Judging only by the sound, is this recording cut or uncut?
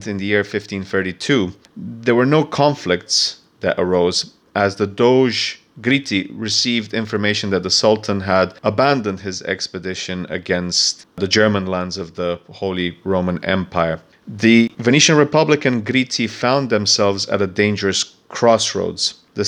cut